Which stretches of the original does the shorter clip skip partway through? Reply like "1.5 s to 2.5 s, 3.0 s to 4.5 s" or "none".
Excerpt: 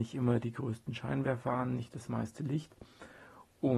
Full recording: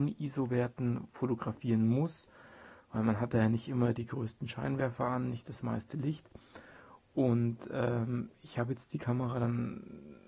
none